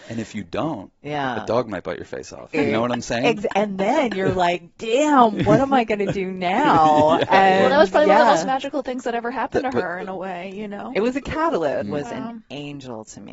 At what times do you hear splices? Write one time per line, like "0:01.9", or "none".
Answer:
0:02.5
0:11.8